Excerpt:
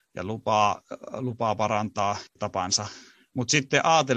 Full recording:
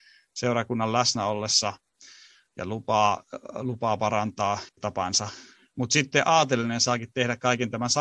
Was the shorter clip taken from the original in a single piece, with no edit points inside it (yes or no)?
yes